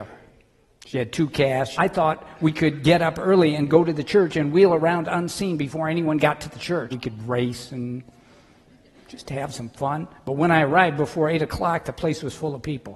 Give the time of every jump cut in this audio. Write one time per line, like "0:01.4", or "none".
0:01.8
0:06.9